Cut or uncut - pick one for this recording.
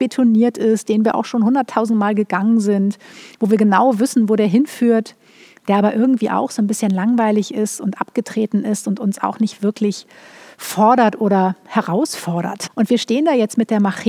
cut